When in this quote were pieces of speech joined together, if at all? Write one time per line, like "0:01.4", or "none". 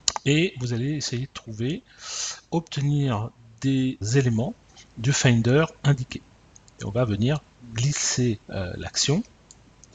0:04.0
0:08.4